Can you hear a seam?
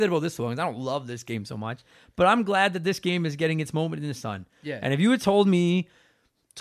no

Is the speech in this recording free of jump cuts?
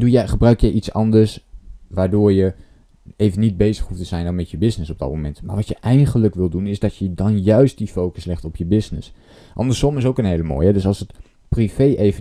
yes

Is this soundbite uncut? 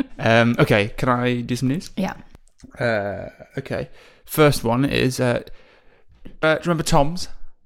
no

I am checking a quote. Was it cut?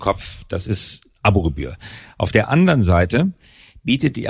no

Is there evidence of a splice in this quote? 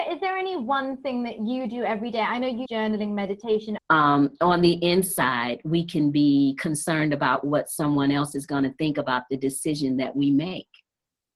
yes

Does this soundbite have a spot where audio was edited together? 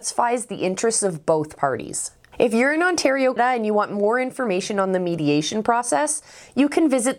yes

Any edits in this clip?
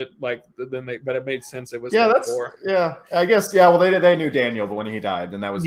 no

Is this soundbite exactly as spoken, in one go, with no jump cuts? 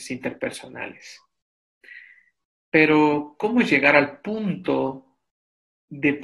yes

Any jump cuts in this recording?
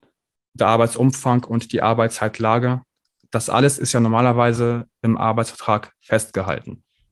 no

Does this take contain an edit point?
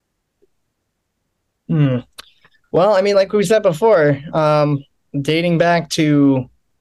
no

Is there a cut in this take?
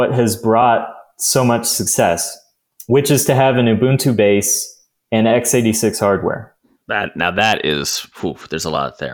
no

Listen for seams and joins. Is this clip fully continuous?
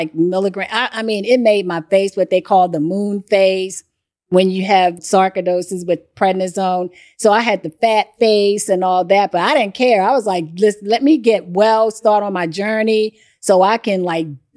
no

